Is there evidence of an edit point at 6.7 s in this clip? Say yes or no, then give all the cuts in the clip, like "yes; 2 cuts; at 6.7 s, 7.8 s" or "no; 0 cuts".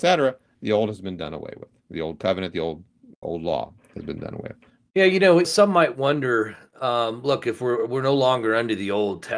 no; 1 cut; at 4.9 s